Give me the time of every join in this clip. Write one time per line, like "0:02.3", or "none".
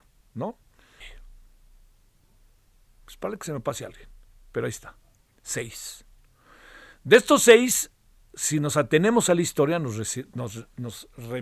0:01.0